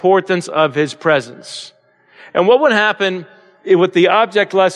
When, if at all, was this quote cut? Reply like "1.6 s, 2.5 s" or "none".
none